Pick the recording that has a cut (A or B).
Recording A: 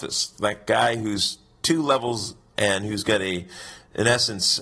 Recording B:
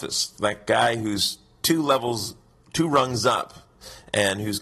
A